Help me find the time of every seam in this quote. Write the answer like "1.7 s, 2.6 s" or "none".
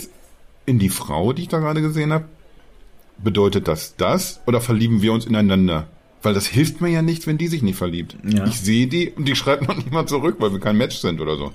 none

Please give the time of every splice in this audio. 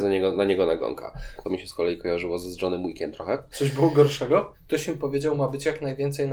1.4 s, 3.5 s, 4.5 s

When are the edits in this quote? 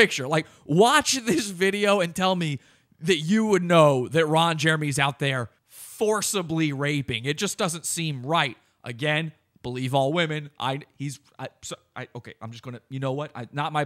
5.6 s

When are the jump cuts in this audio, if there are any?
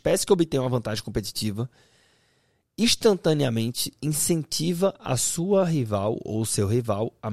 none

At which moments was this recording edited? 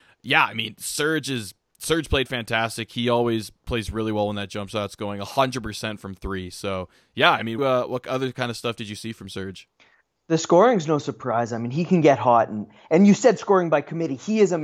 7.6 s

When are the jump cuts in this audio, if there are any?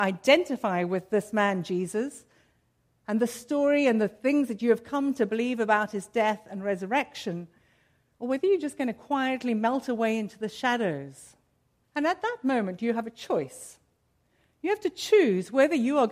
11.8 s

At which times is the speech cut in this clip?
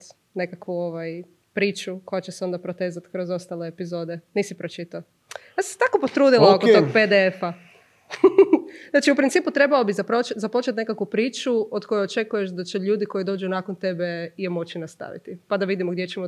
none

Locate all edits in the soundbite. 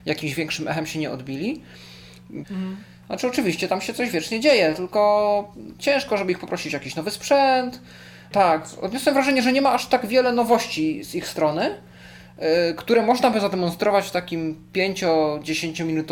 2.4 s, 8.3 s

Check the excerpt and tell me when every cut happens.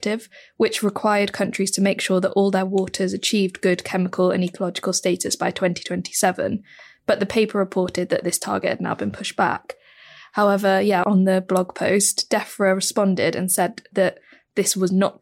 11.0 s

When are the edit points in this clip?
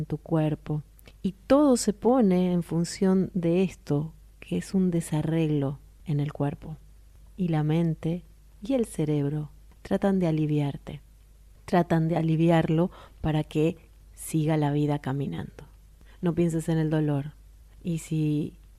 none

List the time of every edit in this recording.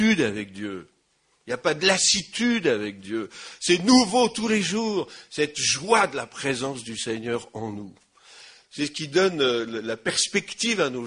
none

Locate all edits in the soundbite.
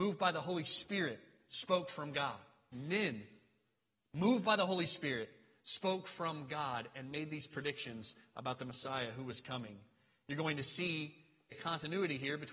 2.7 s, 11.5 s

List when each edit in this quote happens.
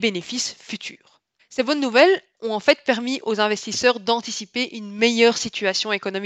1.4 s

